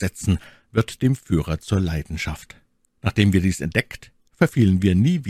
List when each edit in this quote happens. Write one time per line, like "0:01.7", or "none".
0:02.9